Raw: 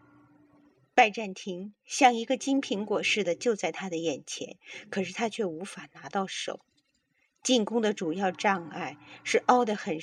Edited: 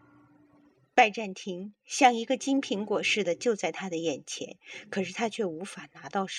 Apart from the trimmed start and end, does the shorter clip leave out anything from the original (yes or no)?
no